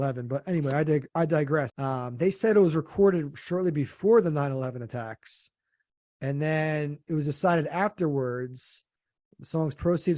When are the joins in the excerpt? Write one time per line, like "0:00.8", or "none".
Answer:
0:01.7

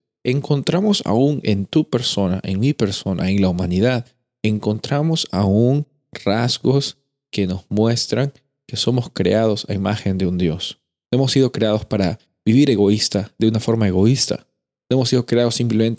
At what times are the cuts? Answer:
0:11.0

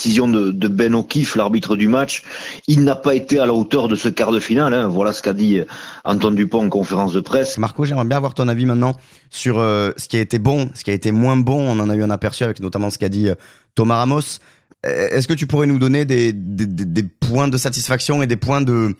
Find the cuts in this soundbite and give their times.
0:07.5

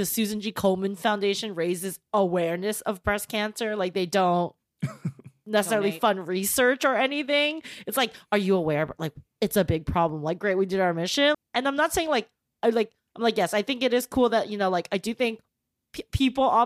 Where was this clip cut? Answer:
0:11.3

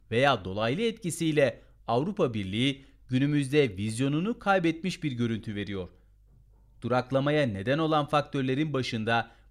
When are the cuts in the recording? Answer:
none

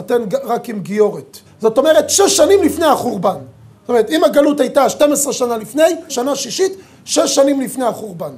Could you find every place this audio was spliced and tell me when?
0:01.5
0:06.1

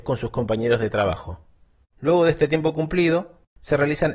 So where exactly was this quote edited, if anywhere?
0:01.8

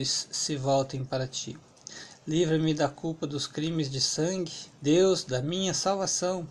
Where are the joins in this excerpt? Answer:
0:04.7

